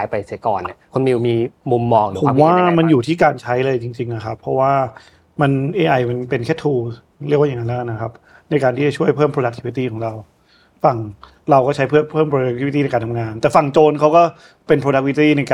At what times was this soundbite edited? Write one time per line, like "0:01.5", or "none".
none